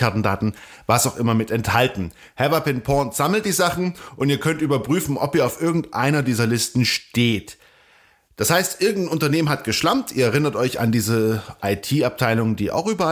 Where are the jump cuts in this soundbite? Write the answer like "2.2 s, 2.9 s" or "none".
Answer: none